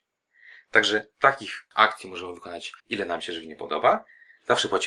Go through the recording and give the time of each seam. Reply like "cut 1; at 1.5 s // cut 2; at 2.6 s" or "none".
cut 1; at 2.8 s